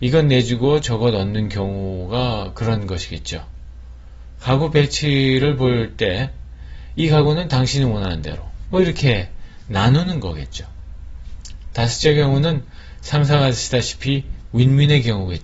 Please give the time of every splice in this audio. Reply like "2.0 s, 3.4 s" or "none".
8.6 s